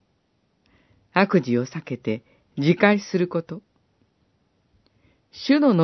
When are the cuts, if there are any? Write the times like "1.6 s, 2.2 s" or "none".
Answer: none